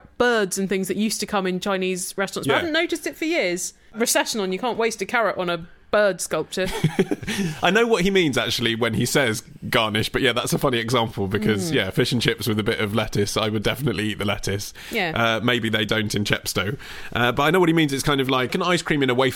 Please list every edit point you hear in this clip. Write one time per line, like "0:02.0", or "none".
none